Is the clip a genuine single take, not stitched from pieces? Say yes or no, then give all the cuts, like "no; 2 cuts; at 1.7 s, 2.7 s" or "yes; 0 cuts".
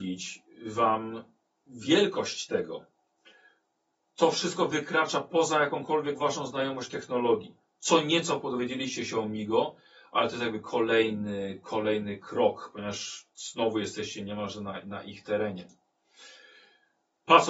yes; 0 cuts